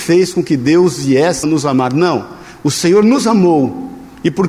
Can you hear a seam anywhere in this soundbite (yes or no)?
yes